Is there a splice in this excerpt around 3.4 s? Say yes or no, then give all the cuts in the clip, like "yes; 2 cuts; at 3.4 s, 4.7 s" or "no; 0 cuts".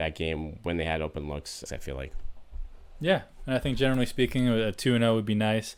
no; 1 cut; at 1.7 s